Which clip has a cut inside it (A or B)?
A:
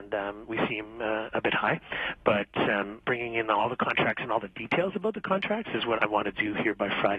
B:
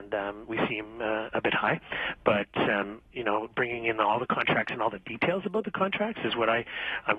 A